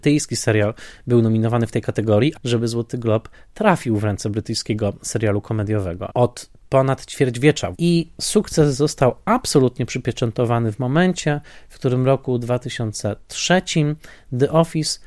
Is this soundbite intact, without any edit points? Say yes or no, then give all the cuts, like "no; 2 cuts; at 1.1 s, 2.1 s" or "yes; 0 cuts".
no; 3 cuts; at 2.3 s, 6.1 s, 7.7 s